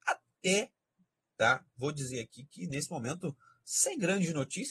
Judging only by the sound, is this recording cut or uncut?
uncut